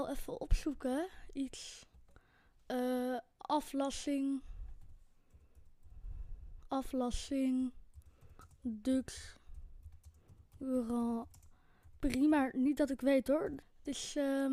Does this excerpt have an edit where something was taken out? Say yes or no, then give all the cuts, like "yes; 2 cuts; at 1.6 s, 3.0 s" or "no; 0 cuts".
yes; 1 cut; at 13.6 s